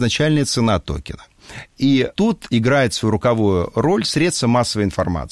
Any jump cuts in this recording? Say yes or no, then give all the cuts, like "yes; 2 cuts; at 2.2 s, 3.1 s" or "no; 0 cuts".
yes; 1 cut; at 2.1 s